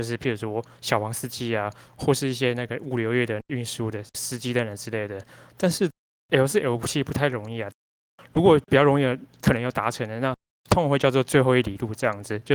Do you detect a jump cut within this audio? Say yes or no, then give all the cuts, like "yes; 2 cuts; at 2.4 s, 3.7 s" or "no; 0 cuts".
no; 0 cuts